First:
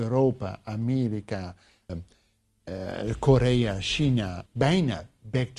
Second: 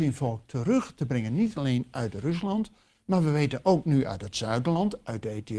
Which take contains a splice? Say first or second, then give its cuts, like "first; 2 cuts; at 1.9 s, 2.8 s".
first; 2 cuts; at 1.9 s, 4.5 s